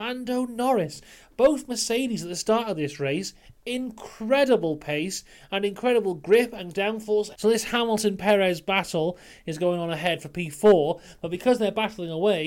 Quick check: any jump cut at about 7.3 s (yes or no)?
yes